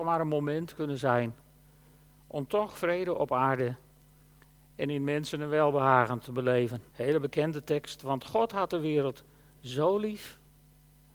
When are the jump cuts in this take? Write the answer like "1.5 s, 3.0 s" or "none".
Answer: 6.9 s